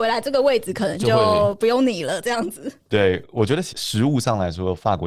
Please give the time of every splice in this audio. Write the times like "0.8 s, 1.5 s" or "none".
3.7 s